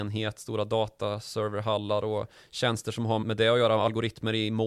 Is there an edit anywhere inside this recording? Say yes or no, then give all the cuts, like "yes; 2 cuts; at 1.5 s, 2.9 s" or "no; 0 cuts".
yes; 1 cut; at 3.2 s